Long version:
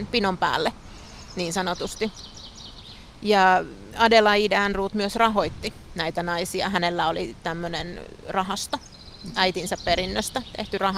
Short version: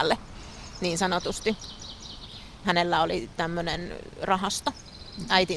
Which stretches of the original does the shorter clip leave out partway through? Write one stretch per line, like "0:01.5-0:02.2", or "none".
0:03.2-0:06.7